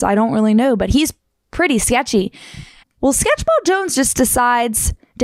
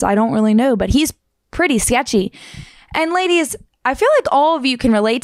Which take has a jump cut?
first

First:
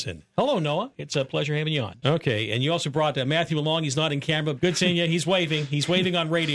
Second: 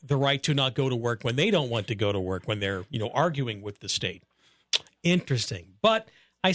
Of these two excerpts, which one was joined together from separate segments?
first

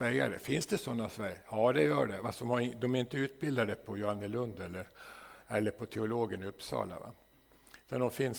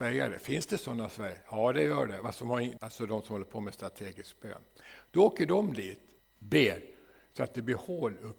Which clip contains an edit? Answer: second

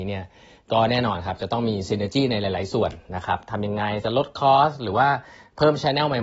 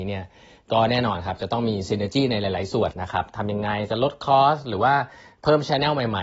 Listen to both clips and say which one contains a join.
second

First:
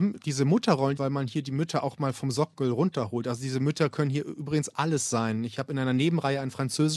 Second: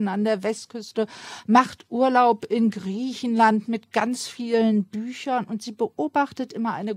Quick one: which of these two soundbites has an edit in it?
first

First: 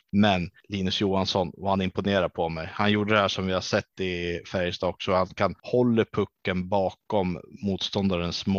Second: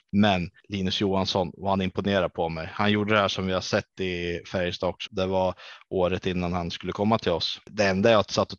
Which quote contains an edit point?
second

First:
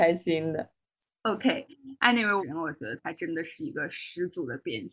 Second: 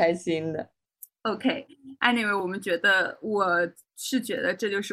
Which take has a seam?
first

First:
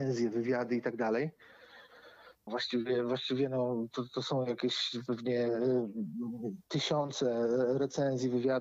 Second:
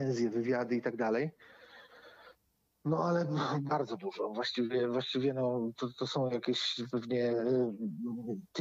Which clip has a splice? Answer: first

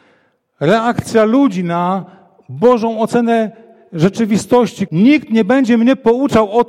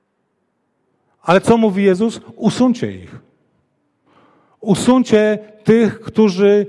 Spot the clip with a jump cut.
first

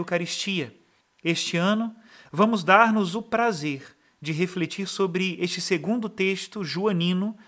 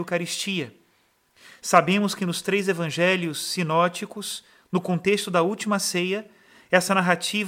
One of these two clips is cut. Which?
first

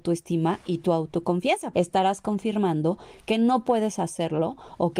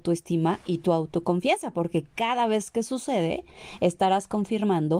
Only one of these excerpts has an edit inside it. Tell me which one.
first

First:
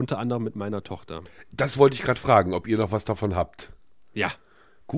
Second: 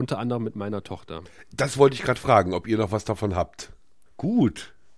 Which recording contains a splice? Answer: second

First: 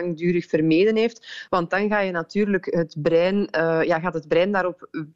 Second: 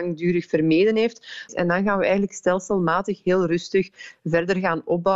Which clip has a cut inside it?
second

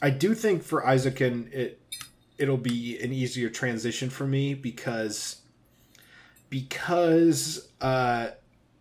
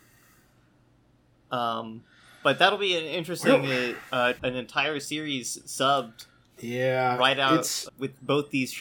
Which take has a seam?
second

